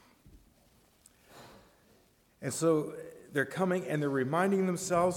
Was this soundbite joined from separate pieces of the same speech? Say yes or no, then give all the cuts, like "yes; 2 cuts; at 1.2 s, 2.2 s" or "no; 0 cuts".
no; 0 cuts